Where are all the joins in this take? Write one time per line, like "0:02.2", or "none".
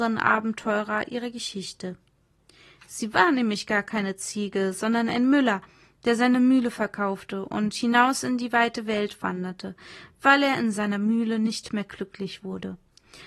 none